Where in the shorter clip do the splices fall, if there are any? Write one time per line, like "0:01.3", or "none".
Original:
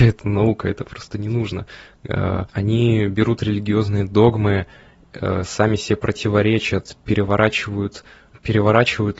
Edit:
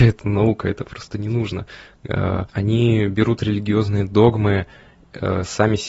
none